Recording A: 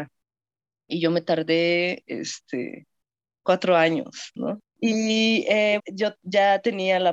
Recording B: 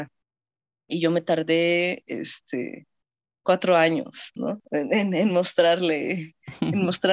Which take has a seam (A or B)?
A